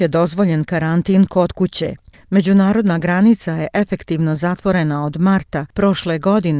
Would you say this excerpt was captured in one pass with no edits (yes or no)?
no